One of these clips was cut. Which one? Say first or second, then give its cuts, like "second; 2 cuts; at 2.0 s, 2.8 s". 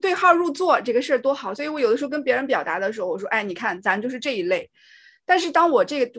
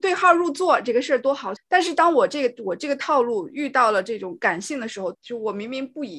second; 2 cuts; at 1.6 s, 5.1 s